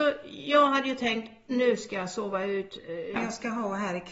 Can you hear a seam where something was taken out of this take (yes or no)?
yes